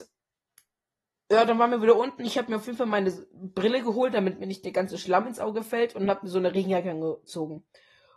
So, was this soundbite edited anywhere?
no; 0 cuts

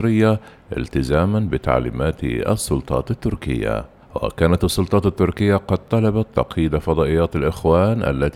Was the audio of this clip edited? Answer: yes; 1 cut; at 4.0 s

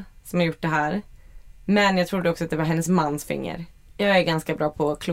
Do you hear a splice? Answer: yes; 1 cut; at 3.9 s

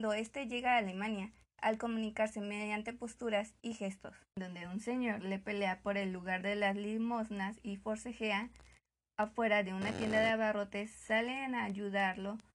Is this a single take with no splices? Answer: yes; 0 cuts

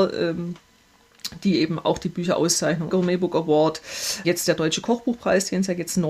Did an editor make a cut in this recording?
yes; 2 cuts; at 2.9 s, 4.2 s

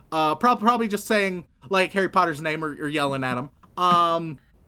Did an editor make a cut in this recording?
no; 0 cuts

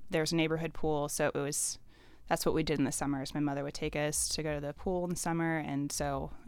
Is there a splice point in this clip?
no; 0 cuts

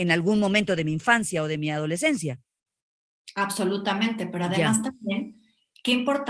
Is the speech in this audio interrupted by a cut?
no; 0 cuts

